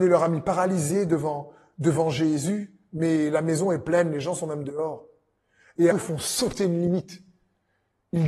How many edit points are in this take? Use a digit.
1